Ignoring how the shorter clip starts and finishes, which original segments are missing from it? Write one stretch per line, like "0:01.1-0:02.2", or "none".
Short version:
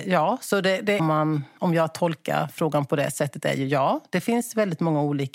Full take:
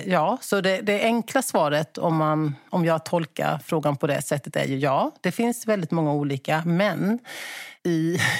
0:01.0-0:02.1